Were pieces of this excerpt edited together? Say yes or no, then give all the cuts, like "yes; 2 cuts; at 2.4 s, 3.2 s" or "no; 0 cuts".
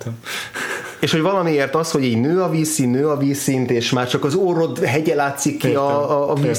no; 0 cuts